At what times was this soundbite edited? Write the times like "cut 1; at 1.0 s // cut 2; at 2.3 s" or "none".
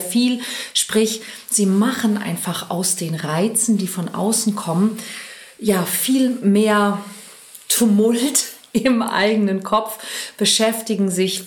none